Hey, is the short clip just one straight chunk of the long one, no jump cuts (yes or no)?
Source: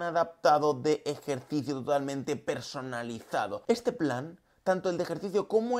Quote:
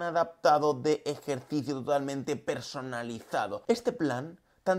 yes